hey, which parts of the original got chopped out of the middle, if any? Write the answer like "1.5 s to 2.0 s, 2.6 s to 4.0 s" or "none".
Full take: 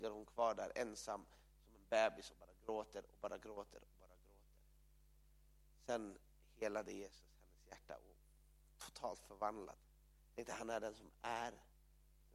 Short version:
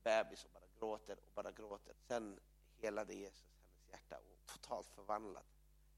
3.8 s to 5.7 s, 8.2 s to 8.7 s